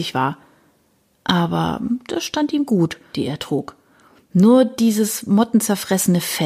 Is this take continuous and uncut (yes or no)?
no